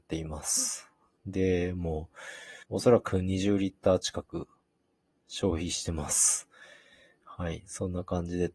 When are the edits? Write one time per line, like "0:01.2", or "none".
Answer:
0:01.2
0:02.6

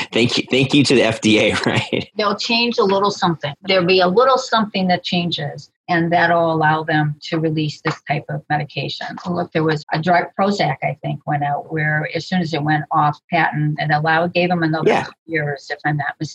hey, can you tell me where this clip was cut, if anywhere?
0:09.8
0:11.6
0:13.8

